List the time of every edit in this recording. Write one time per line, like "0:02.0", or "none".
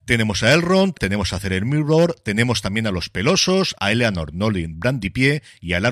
0:00.9
0:03.7